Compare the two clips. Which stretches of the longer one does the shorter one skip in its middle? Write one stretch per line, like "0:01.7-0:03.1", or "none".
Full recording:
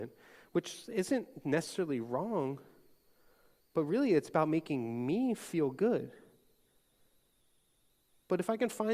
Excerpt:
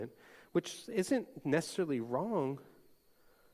none